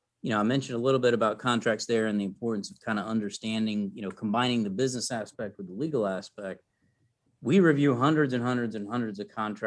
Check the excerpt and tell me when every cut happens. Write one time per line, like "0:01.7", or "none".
none

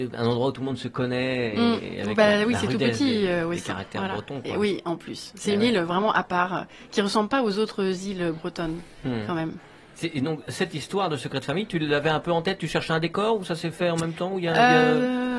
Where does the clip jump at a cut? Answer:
none

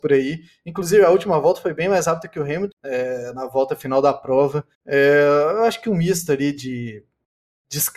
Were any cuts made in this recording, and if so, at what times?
0:02.7
0:04.7

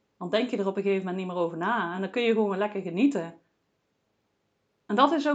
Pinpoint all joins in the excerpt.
none

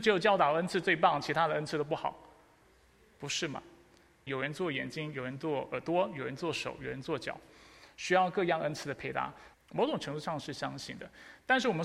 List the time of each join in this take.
0:04.3
0:09.5

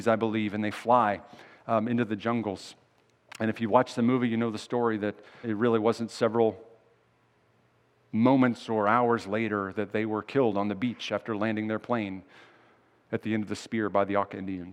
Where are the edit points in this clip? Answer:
0:05.4

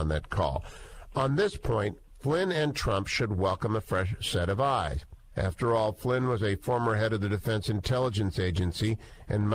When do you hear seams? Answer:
0:05.3

